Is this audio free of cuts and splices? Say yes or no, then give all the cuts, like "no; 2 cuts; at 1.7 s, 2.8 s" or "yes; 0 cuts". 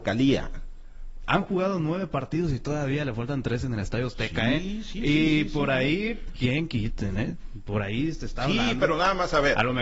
yes; 0 cuts